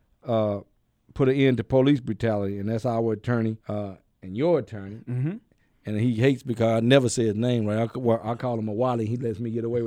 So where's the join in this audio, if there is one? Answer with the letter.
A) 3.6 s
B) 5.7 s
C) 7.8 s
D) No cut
A